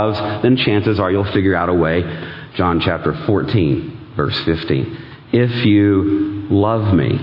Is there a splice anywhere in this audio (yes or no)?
yes